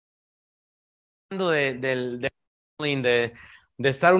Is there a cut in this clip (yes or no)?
no